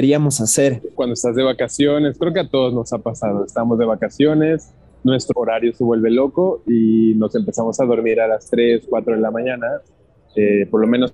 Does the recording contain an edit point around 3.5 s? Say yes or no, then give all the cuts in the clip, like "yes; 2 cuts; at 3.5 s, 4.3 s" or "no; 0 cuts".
no; 2 cuts; at 1.0 s, 5.3 s